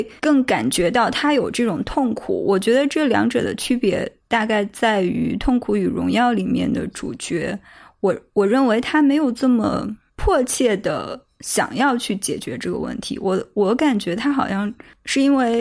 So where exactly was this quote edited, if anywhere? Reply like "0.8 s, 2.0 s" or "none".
none